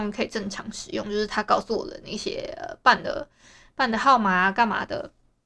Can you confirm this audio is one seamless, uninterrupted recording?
yes; 0 cuts

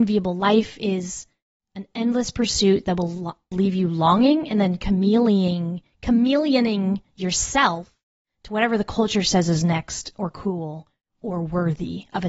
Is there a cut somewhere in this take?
yes; 1 cut; at 3.5 s

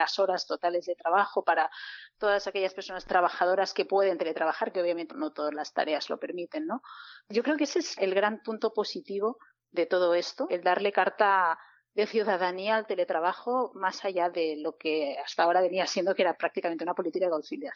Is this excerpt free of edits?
no; 3 cuts; at 5.1 s, 10.5 s, 14.3 s

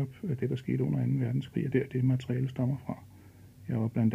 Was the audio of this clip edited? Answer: yes; 1 cut; at 1.7 s

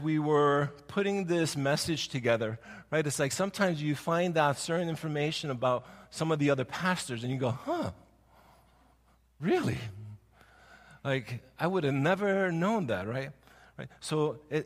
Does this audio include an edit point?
no; 0 cuts

